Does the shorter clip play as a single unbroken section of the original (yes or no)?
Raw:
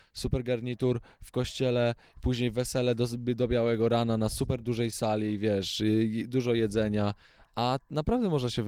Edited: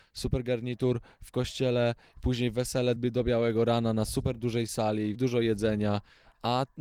no